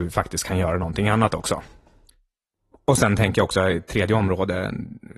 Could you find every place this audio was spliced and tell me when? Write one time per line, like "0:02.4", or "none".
none